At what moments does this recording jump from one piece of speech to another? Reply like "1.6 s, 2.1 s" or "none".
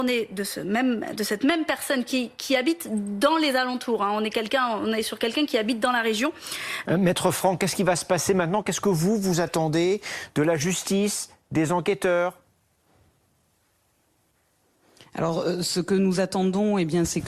6.8 s